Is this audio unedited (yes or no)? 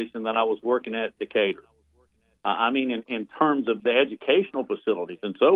no